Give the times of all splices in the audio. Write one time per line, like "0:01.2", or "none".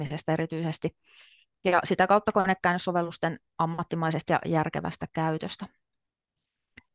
none